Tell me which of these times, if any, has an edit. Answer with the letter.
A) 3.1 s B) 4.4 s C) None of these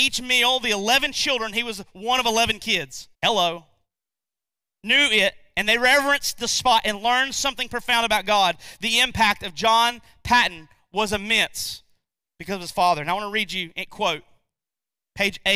A